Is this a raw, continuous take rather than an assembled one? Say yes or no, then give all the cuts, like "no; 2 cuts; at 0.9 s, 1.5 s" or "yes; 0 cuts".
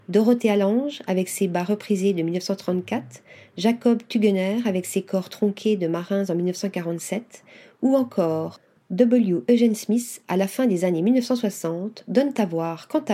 yes; 0 cuts